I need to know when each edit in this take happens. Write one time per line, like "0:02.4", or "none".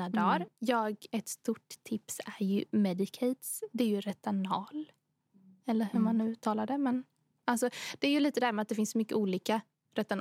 none